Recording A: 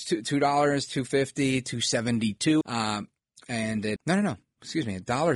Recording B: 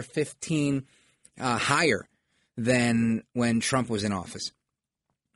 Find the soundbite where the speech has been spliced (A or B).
A